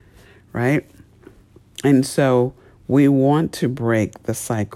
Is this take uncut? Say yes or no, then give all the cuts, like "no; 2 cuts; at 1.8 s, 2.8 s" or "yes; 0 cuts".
yes; 0 cuts